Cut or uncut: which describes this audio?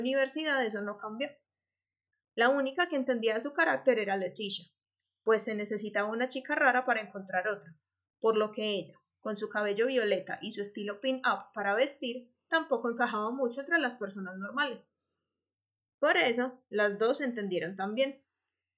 uncut